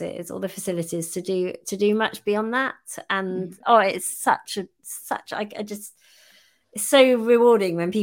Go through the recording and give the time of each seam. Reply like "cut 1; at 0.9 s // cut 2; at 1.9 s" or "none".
cut 1; at 3.6 s